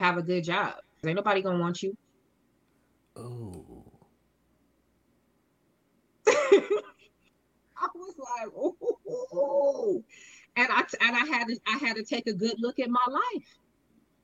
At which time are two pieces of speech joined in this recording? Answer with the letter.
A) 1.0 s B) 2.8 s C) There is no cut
A